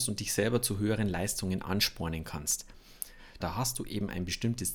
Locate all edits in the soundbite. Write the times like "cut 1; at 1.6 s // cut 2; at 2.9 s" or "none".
cut 1; at 3.4 s